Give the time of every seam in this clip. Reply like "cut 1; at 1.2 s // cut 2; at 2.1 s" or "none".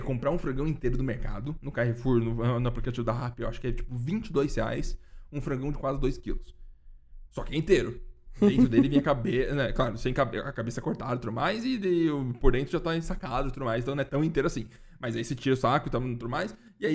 none